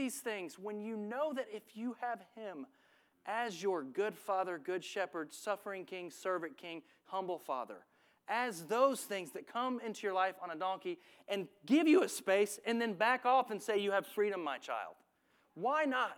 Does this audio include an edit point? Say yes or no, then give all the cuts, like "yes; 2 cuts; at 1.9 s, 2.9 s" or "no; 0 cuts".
no; 0 cuts